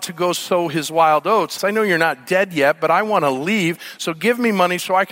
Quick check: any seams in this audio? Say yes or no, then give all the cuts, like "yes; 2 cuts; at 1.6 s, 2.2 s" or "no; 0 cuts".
yes; 1 cut; at 1.6 s